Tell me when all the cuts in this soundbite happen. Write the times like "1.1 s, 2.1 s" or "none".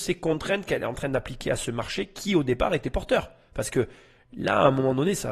none